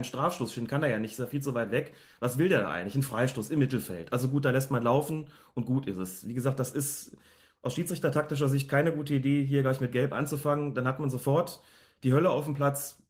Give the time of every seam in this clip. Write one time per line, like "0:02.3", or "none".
none